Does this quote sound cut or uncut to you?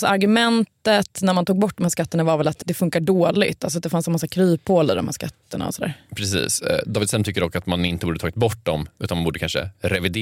cut